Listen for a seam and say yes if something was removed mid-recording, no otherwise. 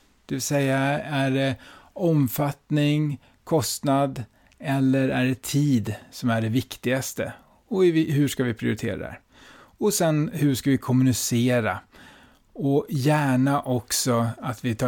no